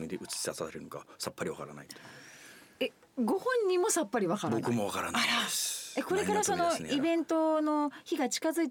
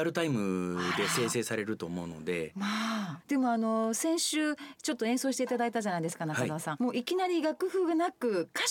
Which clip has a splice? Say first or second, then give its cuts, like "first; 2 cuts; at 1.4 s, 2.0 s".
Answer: second; 2 cuts; at 3.2 s, 6.8 s